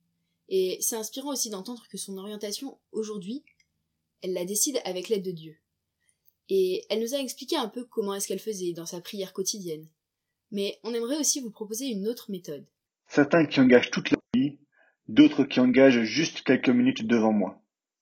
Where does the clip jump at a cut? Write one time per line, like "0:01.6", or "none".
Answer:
0:12.9